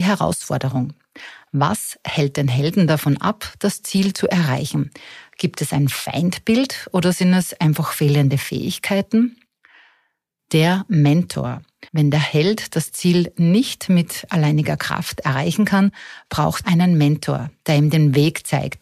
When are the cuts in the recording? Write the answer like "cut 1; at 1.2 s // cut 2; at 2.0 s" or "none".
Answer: cut 1; at 11.9 s // cut 2; at 16.6 s